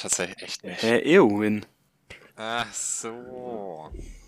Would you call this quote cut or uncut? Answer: cut